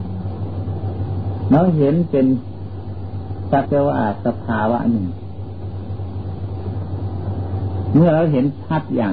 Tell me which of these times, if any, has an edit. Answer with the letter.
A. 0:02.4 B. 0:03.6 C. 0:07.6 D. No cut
B